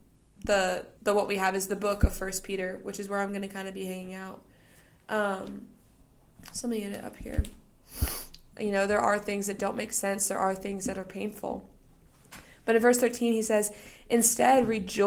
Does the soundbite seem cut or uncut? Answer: cut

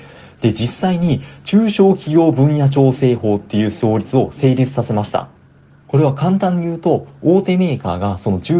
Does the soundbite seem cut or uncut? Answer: uncut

